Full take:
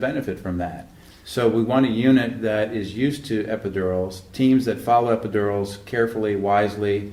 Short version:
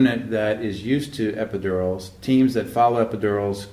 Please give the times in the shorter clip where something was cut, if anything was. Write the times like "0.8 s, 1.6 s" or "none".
none